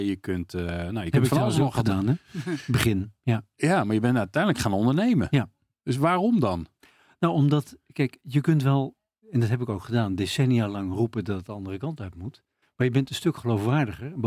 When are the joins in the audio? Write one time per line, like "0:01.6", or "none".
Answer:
0:12.6